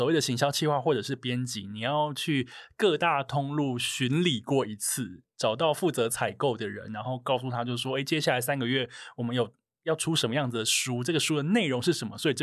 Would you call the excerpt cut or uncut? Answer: uncut